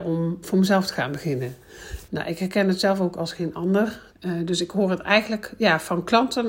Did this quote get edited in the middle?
yes; 2 cuts; at 2.1 s, 4.1 s

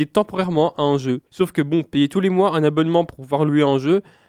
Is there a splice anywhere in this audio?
yes; 1 cut; at 1.3 s

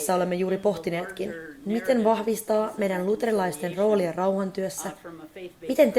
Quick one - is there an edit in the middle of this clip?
no; 0 cuts

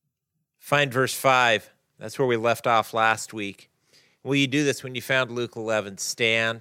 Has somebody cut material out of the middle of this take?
no; 0 cuts

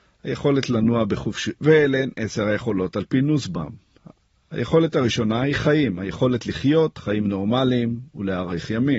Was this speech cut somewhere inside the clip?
yes; 1 cut; at 1.6 s

